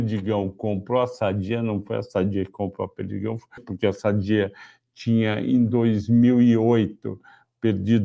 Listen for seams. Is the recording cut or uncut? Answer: cut